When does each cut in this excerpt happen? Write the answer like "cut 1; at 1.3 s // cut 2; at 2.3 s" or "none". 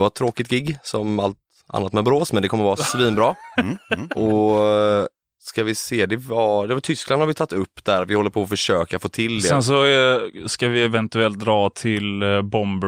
none